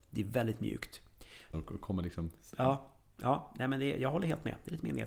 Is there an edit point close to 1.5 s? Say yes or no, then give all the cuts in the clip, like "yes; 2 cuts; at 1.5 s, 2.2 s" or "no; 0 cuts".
yes; 1 cut; at 1.5 s